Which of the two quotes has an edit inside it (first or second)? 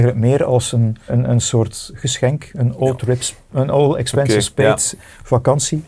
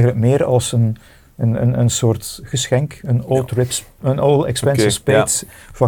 first